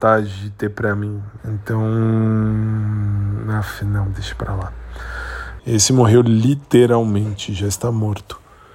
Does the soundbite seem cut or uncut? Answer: cut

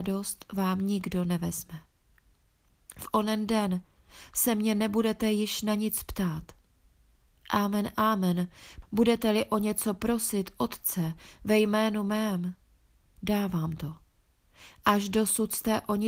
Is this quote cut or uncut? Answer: cut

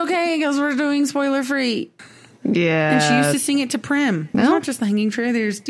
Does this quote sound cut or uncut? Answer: cut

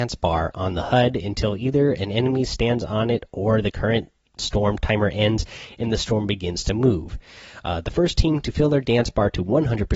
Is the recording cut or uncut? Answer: cut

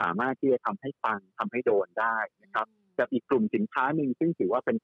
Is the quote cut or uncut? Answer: uncut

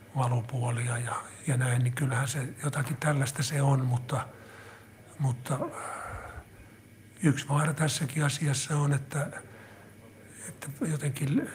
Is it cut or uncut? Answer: uncut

